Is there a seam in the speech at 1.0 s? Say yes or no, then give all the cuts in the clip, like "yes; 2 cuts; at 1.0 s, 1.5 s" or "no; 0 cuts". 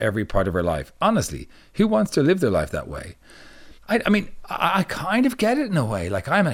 no; 1 cut; at 3.8 s